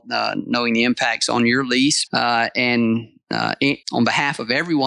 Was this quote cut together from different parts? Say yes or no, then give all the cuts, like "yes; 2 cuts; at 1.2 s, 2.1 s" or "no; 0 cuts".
yes; 2 cuts; at 2.1 s, 3.8 s